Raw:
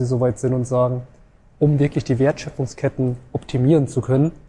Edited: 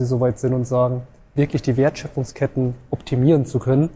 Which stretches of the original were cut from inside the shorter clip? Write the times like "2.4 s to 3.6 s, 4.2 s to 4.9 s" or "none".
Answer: 1.4 s to 1.8 s